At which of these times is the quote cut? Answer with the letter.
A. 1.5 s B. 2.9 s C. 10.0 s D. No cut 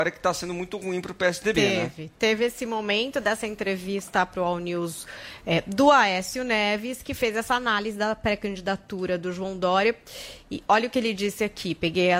D